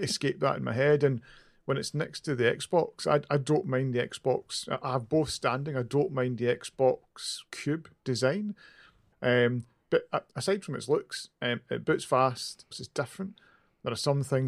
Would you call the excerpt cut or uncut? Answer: cut